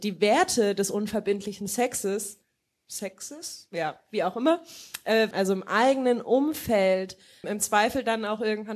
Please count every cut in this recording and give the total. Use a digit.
2